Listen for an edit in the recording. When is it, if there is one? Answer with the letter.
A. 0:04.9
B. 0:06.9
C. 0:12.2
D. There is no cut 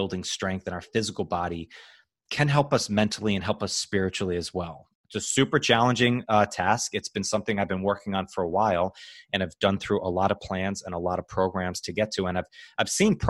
A